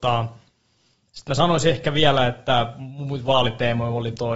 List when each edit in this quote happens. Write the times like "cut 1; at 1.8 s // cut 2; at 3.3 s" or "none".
none